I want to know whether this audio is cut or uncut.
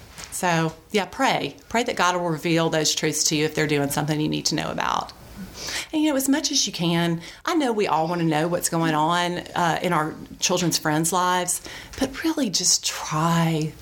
uncut